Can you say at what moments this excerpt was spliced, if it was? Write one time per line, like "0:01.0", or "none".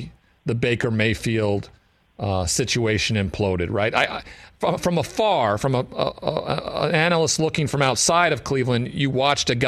none